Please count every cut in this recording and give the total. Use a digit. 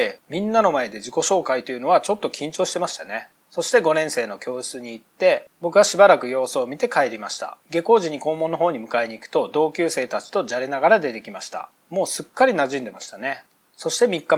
1